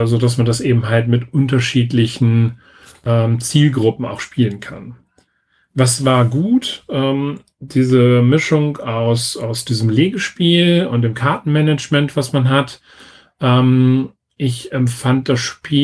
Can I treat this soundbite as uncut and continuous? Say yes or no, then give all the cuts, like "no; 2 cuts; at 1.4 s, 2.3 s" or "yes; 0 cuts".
yes; 0 cuts